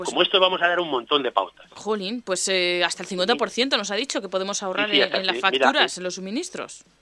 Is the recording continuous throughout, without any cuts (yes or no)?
yes